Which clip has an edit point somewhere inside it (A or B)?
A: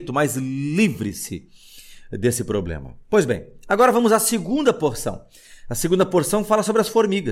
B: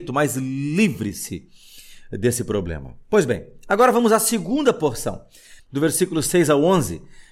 B